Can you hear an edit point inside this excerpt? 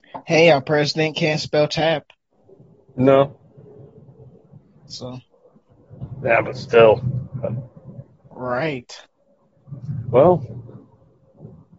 no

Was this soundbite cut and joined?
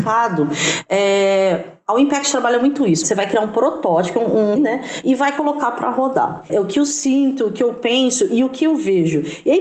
yes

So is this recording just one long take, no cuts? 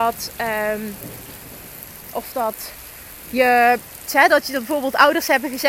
no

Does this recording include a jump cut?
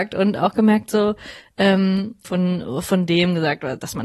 yes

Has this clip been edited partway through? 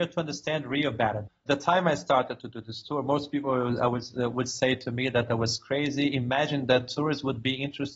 no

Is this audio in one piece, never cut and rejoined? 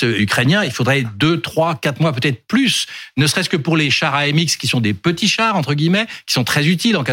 yes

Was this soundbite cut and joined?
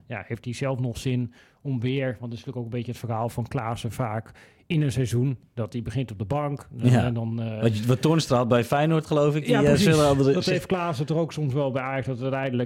no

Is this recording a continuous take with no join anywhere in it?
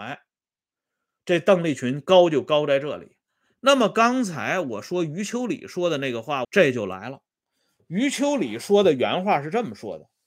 no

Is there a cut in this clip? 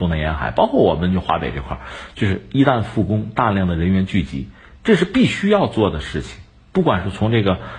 no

